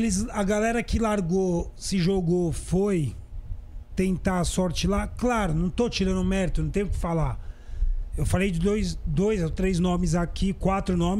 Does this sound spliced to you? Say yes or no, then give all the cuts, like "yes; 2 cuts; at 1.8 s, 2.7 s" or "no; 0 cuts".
no; 0 cuts